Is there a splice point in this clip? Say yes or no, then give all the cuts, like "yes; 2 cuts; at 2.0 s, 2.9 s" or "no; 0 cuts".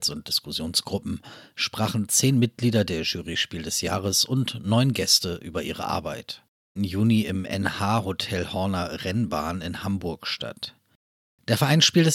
yes; 1 cut; at 6.8 s